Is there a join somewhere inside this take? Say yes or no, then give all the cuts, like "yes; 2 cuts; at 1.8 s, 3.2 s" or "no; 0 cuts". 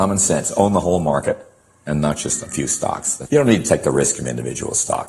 yes; 1 cut; at 3.3 s